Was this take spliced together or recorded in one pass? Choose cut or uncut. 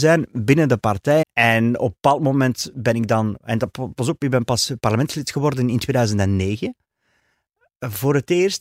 cut